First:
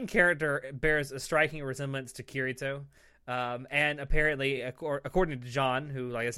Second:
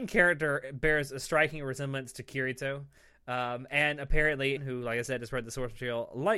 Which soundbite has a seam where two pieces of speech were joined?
second; 1 cut; at 4.6 s

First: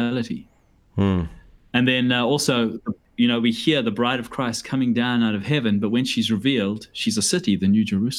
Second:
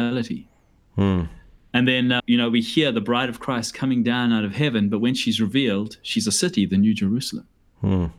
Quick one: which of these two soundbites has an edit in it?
second; 1 cut; at 2.2 s

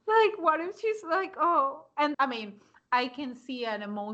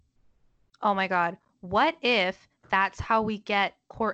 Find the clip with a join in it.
first; 1 cut; at 2.1 s

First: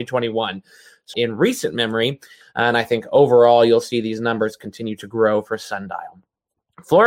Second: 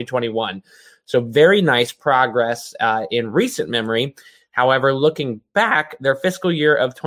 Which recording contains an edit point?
first; 2 cuts; at 1.1 s, 2.4 s

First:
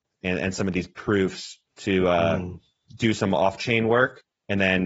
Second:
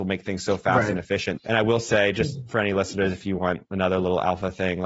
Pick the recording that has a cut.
second; 1 cut; at 1.4 s

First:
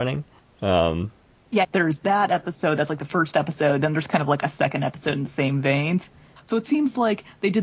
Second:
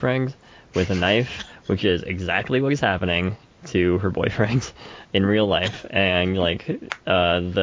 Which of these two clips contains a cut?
first; 2 cuts; at 1.6 s, 6.4 s

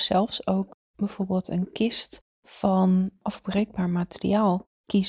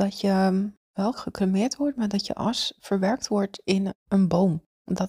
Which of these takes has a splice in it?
second; 1 cut; at 1.1 s

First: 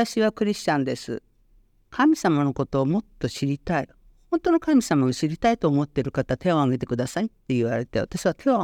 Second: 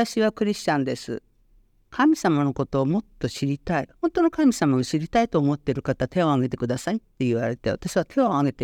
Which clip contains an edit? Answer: second; 1 cut; at 4.0 s

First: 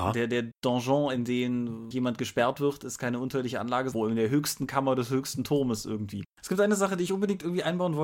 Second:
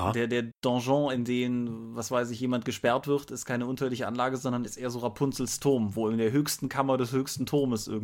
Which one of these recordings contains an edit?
first; 3 cuts; at 1.9 s, 3.9 s, 6.3 s

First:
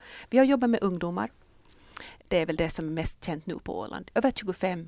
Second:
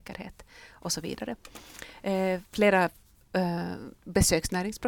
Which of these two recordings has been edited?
first; 1 cut; at 2.2 s

